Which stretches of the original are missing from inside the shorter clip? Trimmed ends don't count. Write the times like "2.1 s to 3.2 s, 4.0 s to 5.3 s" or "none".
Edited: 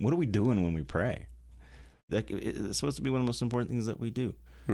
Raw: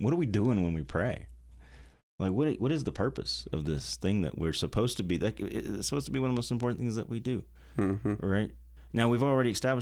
2.1 s to 5.2 s